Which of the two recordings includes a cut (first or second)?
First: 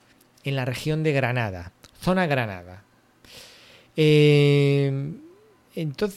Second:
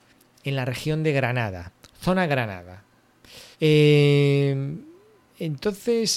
second